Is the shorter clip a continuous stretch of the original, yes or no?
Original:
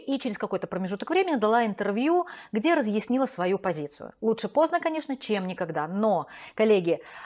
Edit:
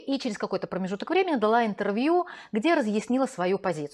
yes